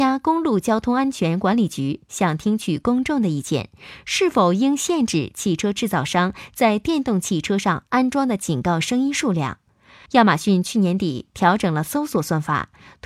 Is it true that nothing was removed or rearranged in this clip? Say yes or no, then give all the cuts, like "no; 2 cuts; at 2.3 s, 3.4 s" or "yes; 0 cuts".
no; 1 cut; at 10.1 s